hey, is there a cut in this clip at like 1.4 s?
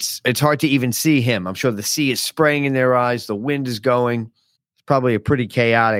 no; 1 cut; at 4.6 s

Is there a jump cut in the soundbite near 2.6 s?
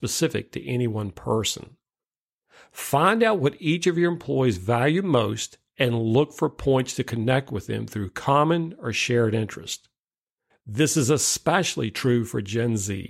no; 1 cut; at 10.5 s

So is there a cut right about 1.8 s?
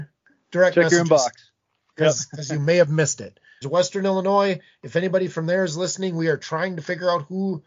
no; 1 cut; at 3.6 s

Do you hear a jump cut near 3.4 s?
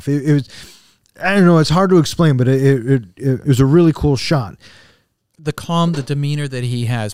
yes; 1 cut; at 3.4 s

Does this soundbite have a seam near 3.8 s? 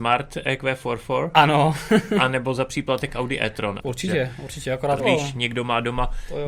yes; 2 cuts; at 3.8 s, 5.0 s

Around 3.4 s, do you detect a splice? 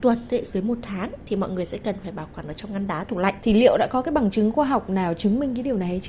yes; 1 cut; at 3.4 s

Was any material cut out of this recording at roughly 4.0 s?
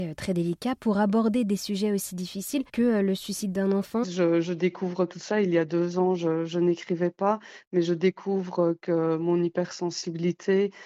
yes; 2 cuts; at 2.7 s, 4.0 s

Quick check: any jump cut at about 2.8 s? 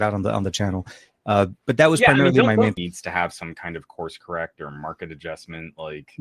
yes; 1 cut; at 2.8 s

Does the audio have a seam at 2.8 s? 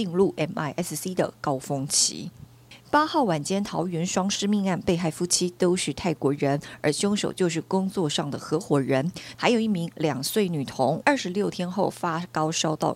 no; 2 cuts; at 9.4 s, 11.0 s

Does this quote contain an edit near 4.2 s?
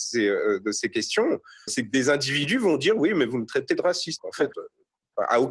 yes; 2 cuts; at 1.7 s, 4.2 s

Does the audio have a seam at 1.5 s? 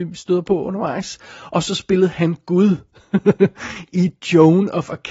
no; 0 cuts

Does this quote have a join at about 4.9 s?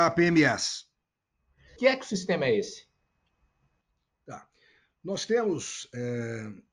no; 1 cut; at 1.8 s

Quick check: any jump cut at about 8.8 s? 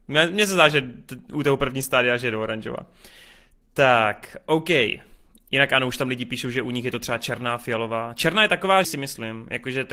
yes; 1 cut; at 8.8 s

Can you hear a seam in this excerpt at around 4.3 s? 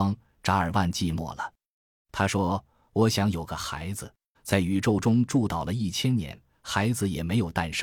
yes; 1 cut; at 4.3 s

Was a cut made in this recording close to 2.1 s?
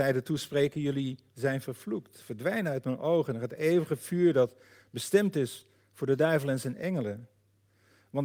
no; 0 cuts

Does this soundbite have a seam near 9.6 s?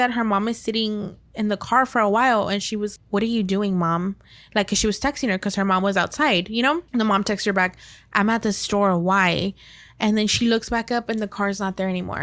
no; 2 cuts; at 3.0 s, 6.9 s

